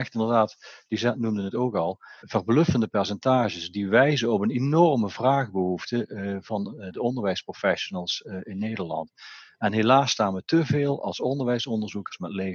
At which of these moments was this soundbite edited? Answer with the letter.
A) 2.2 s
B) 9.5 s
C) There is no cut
A